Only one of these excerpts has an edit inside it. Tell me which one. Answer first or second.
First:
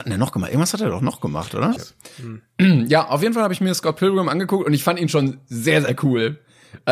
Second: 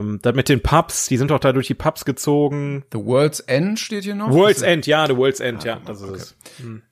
first